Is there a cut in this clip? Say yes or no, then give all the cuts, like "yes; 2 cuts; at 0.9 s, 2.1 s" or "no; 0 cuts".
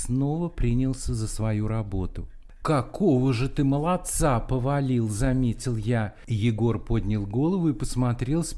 yes; 1 cut; at 2.6 s